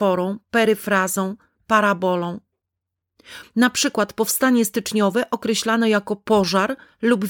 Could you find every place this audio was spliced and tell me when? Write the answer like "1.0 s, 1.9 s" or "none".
3.4 s